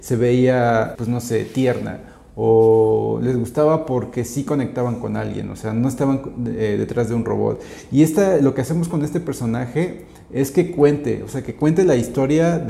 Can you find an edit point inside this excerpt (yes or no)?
yes